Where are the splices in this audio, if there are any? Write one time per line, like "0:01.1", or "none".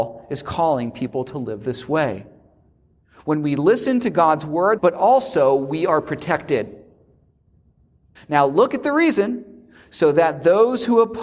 0:04.8
0:08.2